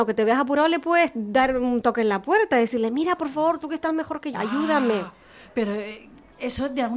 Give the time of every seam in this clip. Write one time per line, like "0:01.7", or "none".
0:04.3